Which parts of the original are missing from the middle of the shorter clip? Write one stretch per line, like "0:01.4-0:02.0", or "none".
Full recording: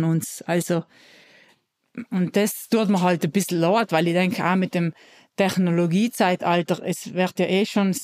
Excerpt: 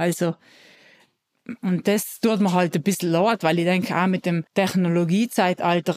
0:05.0-0:05.3

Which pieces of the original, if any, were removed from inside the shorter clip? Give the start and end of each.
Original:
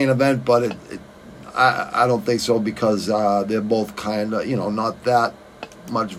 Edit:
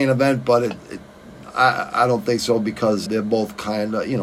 0:03.1-0:03.4

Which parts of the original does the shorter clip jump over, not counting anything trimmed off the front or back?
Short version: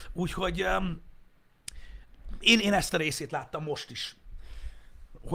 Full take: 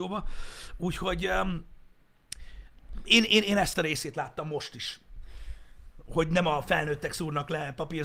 0:03.3-0:03.5

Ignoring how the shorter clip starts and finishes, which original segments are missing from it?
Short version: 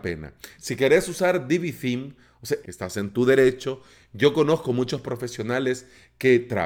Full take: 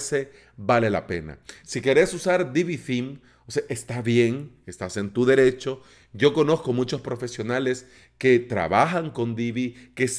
0:03.7-0:04.6

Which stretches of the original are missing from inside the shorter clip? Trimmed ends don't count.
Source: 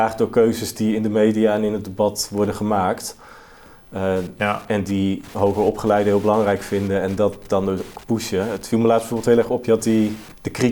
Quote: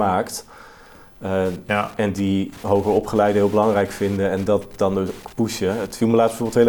none

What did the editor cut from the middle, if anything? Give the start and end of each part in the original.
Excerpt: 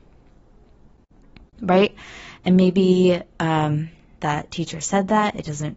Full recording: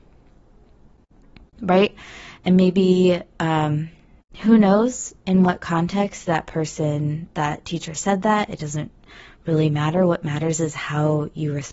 0:04.2-0:07.3

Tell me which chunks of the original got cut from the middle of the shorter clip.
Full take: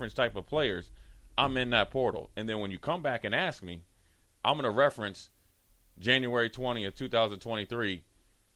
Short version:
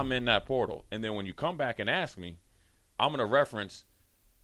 none

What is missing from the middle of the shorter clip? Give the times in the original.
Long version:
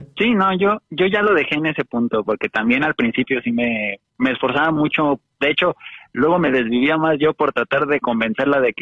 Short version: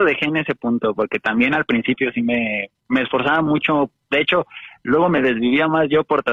none

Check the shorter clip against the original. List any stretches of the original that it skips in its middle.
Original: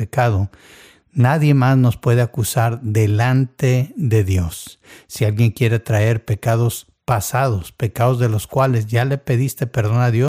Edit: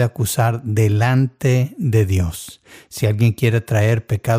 none

